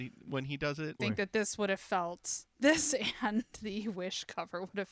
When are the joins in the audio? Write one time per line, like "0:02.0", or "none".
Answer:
0:01.0